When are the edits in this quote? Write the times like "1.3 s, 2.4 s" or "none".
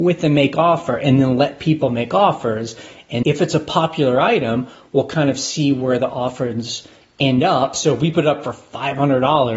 3.2 s